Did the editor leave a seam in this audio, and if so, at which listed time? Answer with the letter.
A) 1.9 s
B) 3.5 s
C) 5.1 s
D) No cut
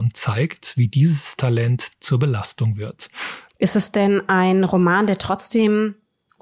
B